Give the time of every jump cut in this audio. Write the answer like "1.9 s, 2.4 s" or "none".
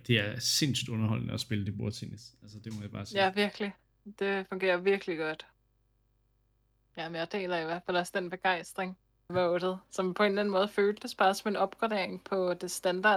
6.9 s, 9.3 s